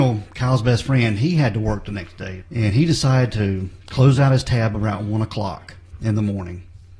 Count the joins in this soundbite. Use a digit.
1